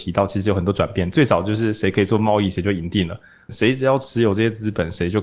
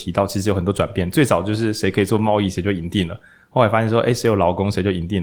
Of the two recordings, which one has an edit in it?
first; 1 cut; at 3.5 s

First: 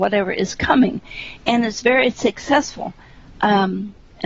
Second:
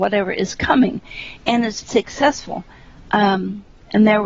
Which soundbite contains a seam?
second; 1 cut; at 1.8 s

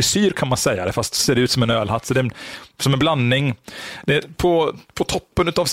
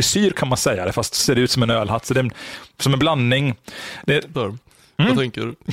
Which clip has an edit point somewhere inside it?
second; 1 cut; at 4.3 s

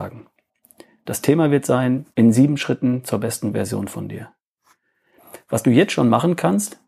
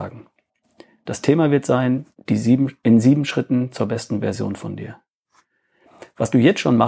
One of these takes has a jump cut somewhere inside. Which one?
first; 1 cut; at 2.1 s

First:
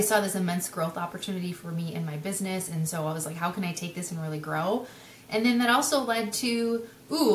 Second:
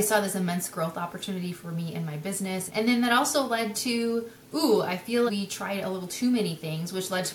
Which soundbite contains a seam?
second; 2 cuts; at 2.7 s, 5.3 s

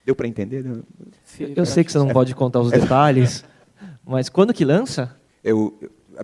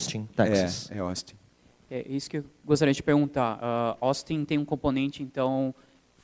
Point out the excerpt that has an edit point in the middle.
first; 1 cut; at 5.3 s

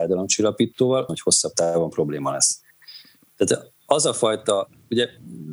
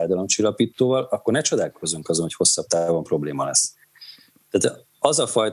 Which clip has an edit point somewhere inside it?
first; 1 cut; at 1.1 s

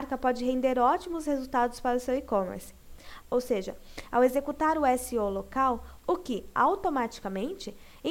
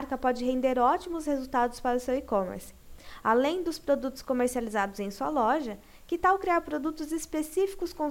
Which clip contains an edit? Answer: first; 2 cuts; at 3.2 s, 6.0 s

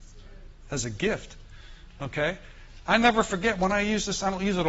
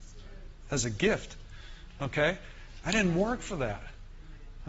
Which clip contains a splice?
second; 1 cut; at 2.8 s

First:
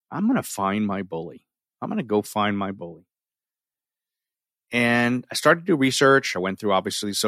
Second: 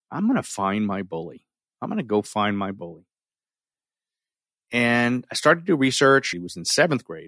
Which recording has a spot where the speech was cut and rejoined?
second; 1 cut; at 6.3 s

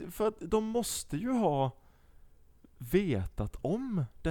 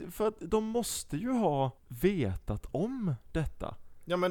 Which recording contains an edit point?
second; 1 cut; at 1.8 s

